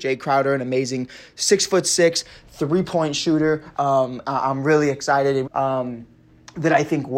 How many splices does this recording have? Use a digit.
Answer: 2